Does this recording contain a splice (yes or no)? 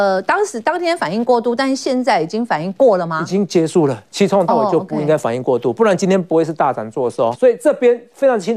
yes